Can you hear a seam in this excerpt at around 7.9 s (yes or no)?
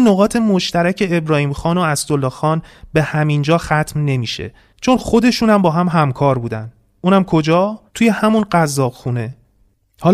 yes